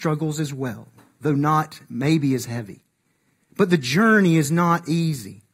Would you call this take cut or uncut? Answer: uncut